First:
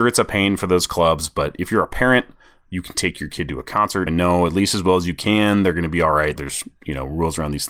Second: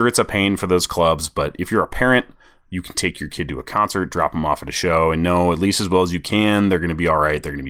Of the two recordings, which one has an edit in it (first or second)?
first